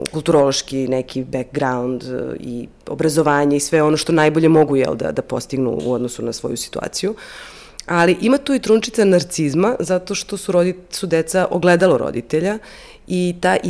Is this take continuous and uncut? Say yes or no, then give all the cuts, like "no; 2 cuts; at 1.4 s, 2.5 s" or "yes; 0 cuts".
yes; 0 cuts